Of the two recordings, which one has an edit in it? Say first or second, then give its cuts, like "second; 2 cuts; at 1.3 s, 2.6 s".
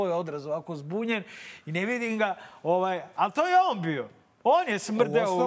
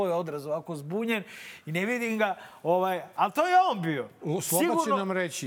second; 1 cut; at 4.2 s